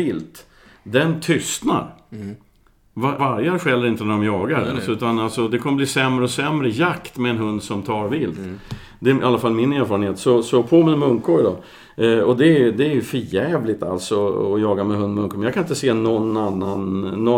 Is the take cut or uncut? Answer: cut